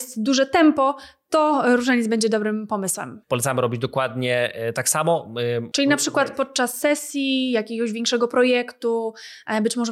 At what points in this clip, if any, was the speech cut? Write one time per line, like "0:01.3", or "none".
0:03.2
0:05.7